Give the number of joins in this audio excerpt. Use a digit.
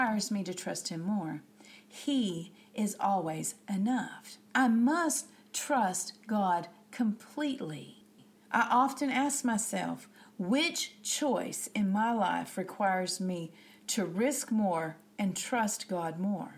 0